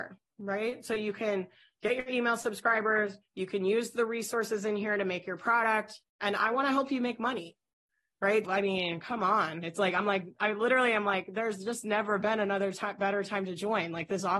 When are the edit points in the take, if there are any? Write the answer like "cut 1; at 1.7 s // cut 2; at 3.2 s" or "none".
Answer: cut 1; at 6.0 s // cut 2; at 8.4 s // cut 3; at 9.6 s